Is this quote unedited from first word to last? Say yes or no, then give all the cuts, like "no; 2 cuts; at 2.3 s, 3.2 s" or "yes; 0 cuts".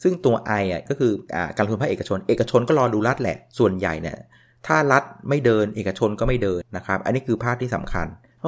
no; 1 cut; at 6.6 s